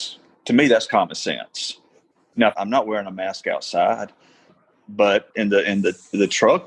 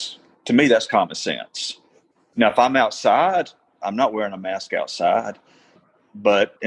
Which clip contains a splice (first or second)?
first